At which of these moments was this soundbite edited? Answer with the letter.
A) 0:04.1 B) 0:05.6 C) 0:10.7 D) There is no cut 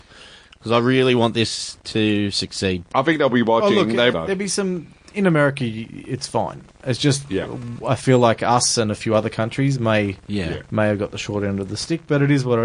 A